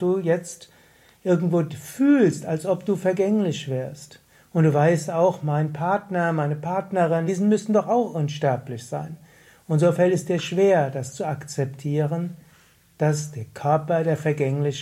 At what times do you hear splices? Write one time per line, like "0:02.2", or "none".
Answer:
0:07.3

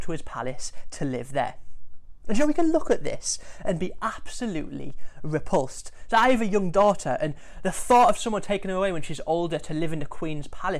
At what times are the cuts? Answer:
none

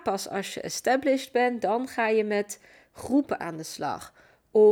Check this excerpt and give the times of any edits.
none

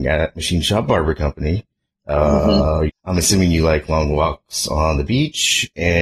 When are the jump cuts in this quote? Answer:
0:02.9

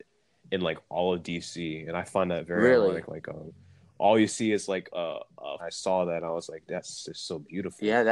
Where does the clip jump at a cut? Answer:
0:05.6

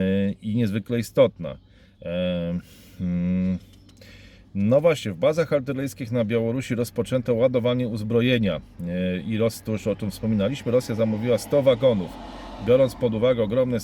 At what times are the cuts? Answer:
none

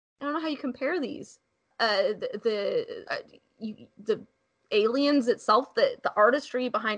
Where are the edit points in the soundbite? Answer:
0:01.7
0:03.1

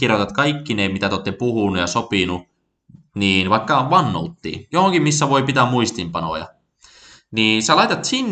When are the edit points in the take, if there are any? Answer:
none

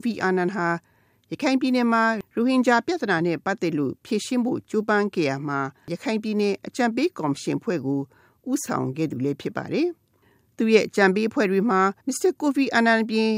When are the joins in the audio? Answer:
0:12.0

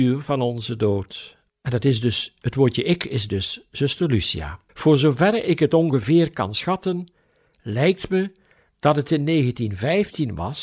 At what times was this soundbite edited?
0:01.5
0:04.7

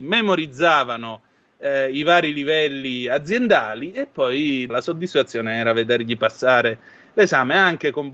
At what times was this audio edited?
0:04.7

